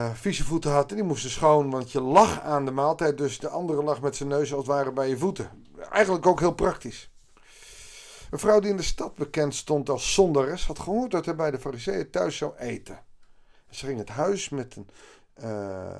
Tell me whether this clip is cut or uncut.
uncut